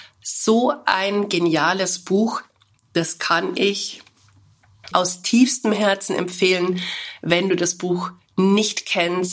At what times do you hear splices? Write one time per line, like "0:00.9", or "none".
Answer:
0:04.9